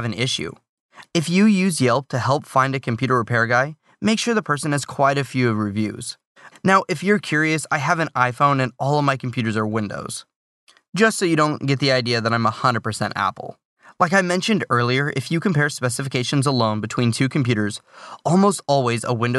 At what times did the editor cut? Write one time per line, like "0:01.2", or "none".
0:01.0
0:06.5